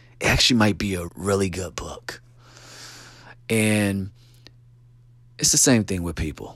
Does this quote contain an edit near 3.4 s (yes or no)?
no